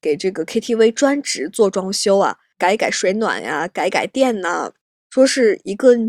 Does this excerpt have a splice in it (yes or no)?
no